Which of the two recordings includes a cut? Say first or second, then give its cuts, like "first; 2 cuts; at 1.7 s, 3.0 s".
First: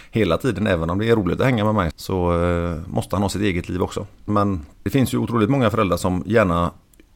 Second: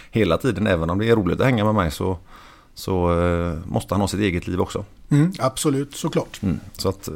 first; 2 cuts; at 1.9 s, 4.3 s